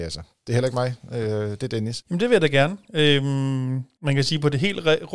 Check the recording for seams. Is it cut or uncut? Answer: cut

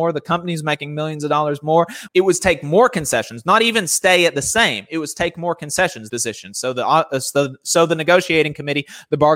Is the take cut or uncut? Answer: cut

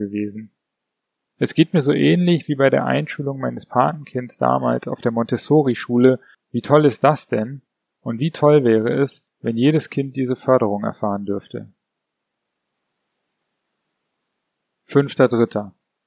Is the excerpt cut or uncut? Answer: cut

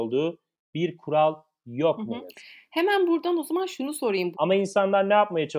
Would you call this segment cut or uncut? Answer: cut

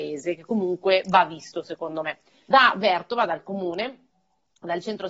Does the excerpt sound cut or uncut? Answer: cut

